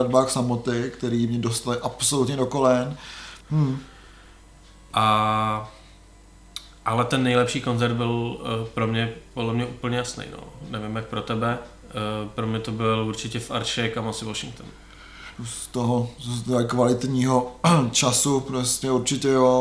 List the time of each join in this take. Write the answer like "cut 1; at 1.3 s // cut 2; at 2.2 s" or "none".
cut 1; at 3.4 s // cut 2; at 15.3 s